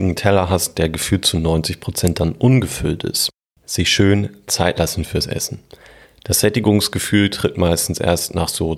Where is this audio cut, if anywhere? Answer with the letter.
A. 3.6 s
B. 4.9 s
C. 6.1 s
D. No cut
A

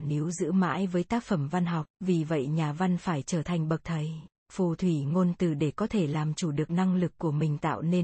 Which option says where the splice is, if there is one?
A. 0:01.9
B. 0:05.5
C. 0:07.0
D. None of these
A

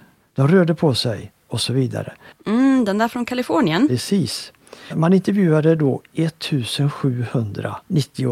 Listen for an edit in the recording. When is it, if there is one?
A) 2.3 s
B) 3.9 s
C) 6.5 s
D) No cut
A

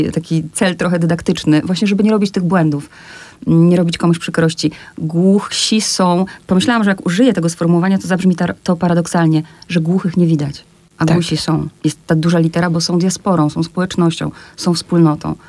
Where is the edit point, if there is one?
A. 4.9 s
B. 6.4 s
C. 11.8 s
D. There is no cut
D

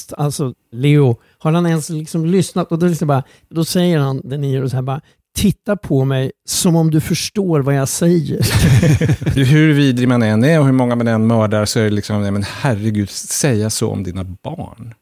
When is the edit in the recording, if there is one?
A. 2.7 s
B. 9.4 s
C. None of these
B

